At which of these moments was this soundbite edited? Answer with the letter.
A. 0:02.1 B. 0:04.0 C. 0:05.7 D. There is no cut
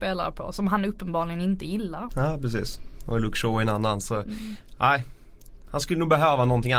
A